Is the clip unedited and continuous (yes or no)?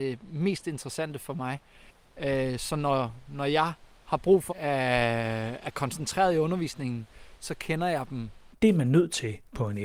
no